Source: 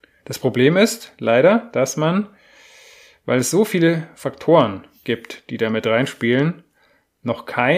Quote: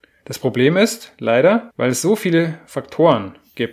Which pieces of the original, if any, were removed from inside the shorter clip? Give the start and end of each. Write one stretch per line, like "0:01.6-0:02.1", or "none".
0:01.7-0:03.2